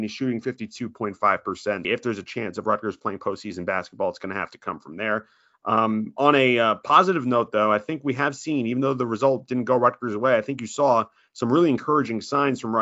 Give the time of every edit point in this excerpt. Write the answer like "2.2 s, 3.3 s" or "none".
1.8 s